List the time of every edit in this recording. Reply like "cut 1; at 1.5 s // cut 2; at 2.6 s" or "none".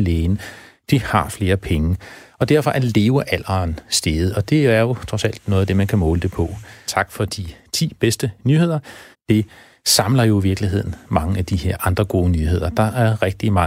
cut 1; at 6.9 s // cut 2; at 9.1 s